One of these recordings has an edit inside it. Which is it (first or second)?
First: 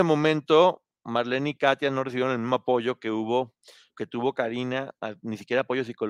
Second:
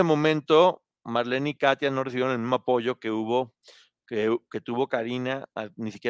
first